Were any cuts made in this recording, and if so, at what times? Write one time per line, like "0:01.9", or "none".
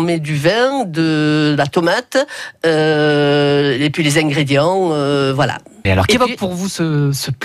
0:05.8